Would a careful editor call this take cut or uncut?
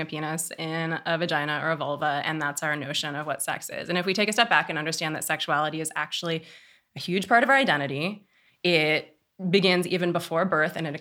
uncut